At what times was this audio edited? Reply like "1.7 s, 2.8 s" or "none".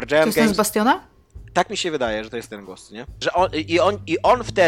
3.2 s